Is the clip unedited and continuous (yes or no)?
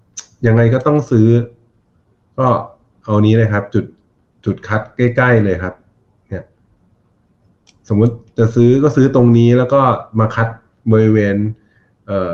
yes